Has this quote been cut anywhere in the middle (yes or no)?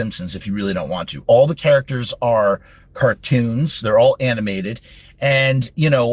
no